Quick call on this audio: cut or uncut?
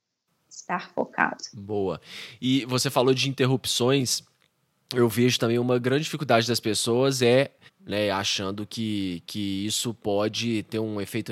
cut